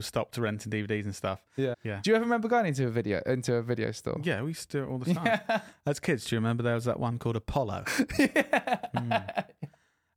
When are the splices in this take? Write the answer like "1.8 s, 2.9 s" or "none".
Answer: 1.7 s